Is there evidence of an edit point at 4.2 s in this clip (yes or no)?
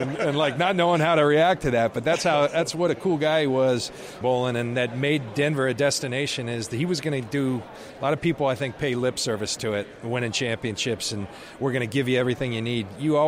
yes